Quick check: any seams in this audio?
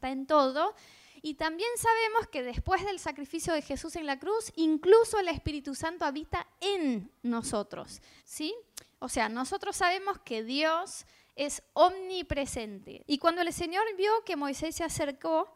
yes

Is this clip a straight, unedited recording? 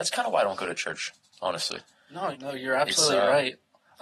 no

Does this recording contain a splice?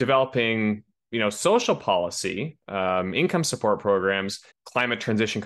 yes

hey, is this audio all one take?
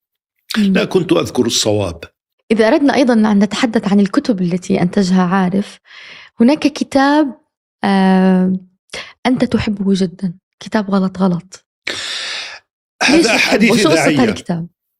yes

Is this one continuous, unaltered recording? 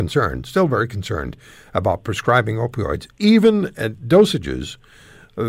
yes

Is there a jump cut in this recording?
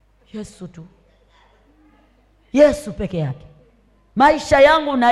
no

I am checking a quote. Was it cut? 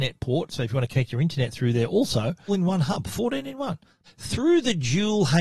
yes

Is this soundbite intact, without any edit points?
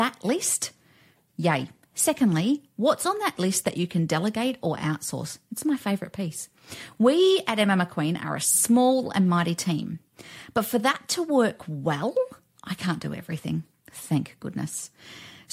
yes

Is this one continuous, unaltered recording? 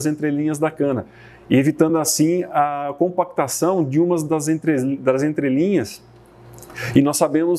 yes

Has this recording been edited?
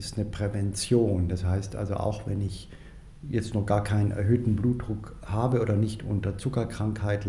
no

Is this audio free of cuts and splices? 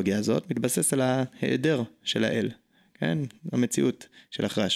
yes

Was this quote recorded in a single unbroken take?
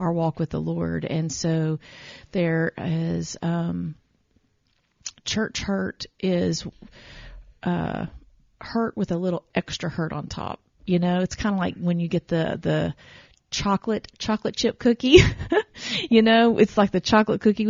yes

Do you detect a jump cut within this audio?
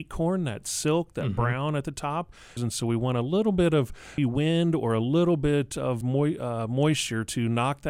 yes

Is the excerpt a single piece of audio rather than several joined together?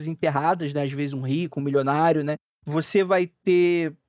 yes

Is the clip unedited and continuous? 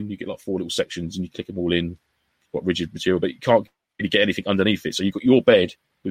yes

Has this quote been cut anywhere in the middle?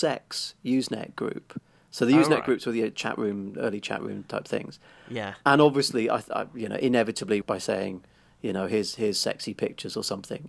yes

